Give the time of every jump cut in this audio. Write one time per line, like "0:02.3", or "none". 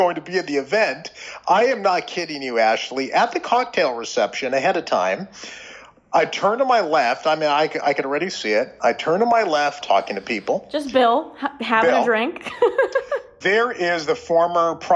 0:09.8
0:13.4